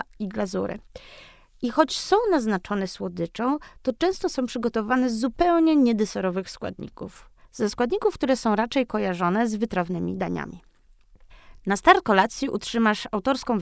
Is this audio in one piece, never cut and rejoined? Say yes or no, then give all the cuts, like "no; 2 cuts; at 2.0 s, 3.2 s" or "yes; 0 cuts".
yes; 0 cuts